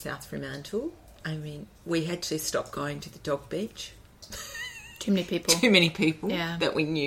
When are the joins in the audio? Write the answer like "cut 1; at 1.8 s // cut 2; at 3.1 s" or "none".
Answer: none